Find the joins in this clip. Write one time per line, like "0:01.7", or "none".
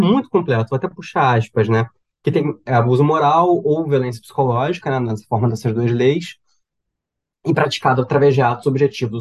none